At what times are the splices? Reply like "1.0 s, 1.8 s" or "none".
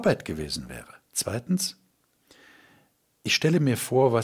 1.0 s